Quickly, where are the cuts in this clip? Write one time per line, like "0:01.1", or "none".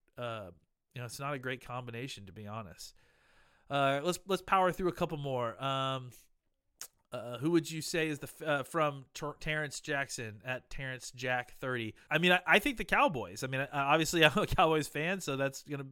0:12.1